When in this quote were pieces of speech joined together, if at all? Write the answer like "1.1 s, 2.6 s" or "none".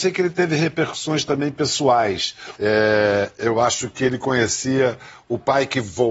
2.6 s